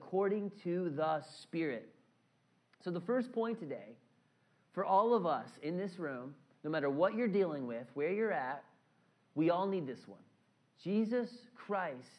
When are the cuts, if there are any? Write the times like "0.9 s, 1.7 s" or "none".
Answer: 10.7 s